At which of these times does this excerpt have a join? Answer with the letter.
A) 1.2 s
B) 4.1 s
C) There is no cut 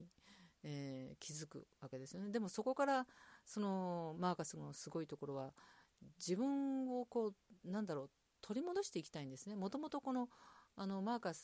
B